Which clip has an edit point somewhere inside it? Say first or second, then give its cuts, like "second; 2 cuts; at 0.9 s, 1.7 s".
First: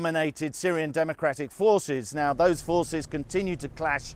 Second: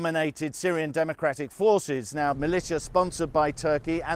second; 1 cut; at 2.3 s